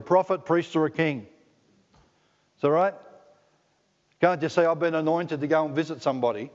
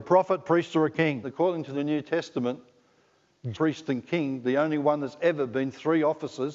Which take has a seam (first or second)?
second